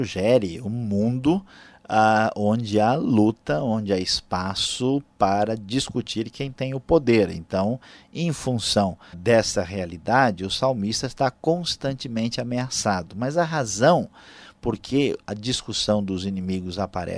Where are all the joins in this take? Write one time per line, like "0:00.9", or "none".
0:09.1